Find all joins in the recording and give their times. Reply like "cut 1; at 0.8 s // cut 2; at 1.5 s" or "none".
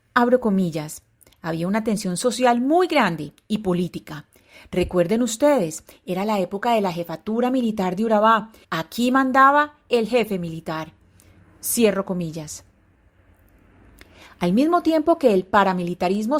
cut 1; at 8.6 s